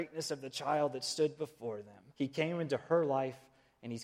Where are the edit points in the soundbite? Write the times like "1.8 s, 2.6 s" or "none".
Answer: 2.1 s